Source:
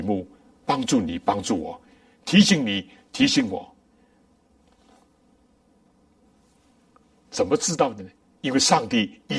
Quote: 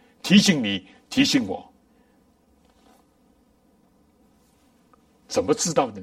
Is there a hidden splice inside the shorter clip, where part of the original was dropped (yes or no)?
no